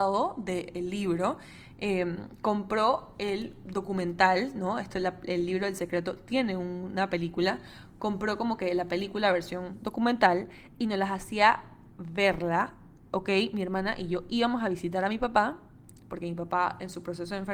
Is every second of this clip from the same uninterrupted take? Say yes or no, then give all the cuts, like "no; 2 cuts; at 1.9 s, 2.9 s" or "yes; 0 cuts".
yes; 0 cuts